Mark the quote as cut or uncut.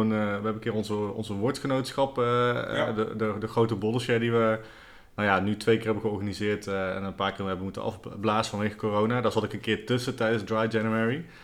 uncut